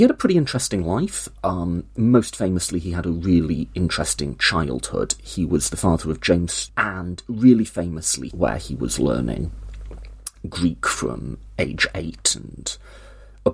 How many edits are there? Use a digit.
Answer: 2